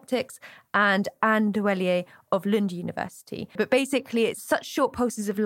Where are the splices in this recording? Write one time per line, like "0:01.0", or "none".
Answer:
0:03.6